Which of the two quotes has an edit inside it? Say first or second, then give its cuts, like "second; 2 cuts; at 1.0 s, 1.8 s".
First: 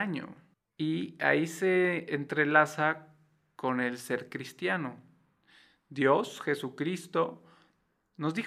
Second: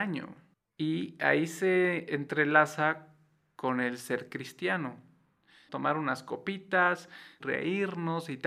second; 2 cuts; at 5.7 s, 7.4 s